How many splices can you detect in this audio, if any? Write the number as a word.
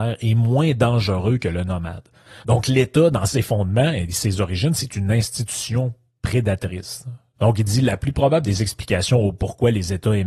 two